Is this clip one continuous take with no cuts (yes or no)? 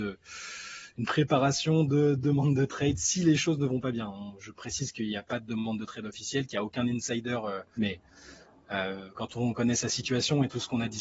no